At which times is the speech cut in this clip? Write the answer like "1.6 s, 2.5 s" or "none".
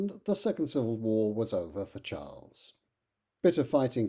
none